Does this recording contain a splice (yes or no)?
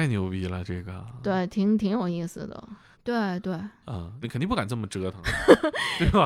yes